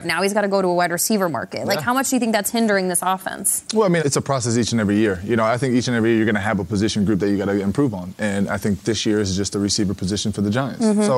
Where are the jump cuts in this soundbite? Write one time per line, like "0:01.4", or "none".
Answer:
0:04.0